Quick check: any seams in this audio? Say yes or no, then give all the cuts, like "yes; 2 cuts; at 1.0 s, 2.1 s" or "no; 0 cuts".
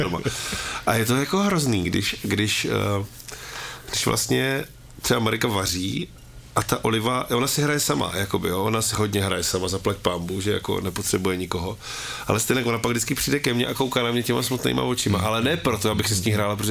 no; 0 cuts